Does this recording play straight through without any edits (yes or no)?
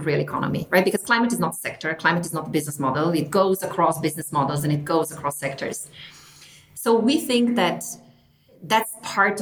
yes